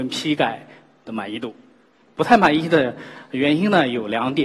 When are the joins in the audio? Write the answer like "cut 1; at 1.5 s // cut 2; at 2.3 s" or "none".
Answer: cut 1; at 2.0 s